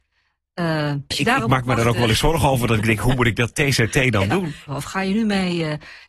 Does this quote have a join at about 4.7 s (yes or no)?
yes